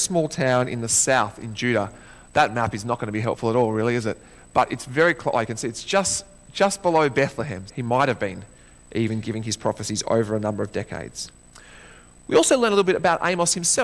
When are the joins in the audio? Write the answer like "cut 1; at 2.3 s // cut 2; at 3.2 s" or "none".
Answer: cut 1; at 7.7 s